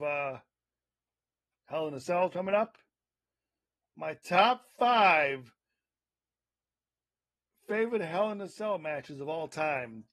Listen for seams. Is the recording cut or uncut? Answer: uncut